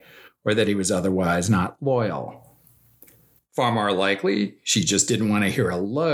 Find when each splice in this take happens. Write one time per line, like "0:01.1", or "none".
none